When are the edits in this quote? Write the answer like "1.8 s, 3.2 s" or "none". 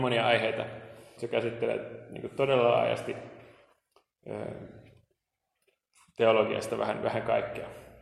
1.2 s